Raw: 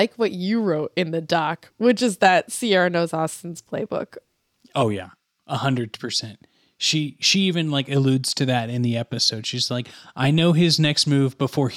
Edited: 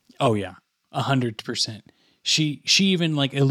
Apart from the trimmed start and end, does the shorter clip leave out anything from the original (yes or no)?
no